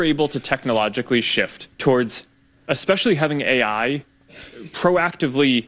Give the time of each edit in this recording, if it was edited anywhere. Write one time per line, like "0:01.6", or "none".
0:01.7